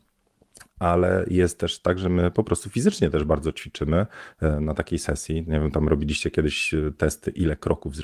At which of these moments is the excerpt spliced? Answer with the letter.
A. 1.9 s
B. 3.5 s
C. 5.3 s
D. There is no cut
D